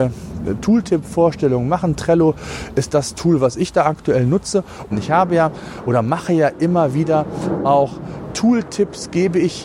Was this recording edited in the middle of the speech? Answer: yes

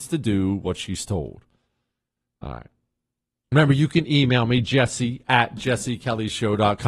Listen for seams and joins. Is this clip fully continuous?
yes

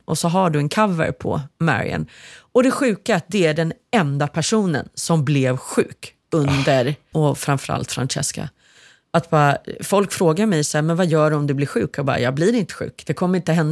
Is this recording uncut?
no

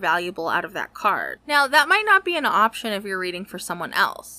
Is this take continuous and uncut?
yes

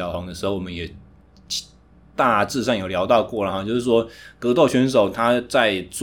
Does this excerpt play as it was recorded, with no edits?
yes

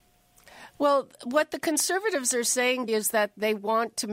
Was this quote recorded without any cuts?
no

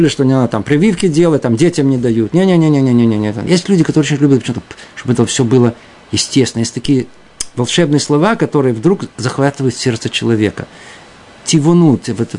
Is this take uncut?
yes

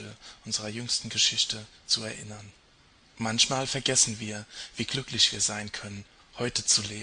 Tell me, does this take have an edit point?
no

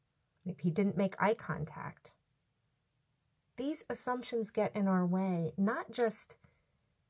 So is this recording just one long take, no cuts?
no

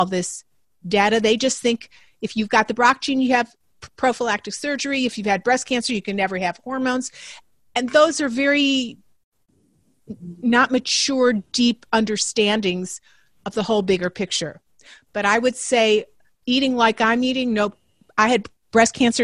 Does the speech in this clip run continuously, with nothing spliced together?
yes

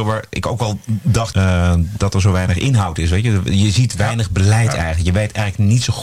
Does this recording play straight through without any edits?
no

